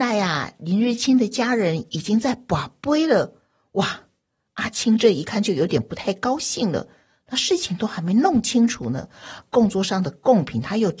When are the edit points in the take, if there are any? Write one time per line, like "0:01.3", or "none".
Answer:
none